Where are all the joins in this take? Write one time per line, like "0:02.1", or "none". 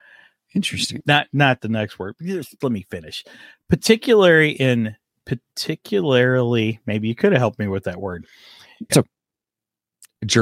0:01.0
0:02.6
0:08.9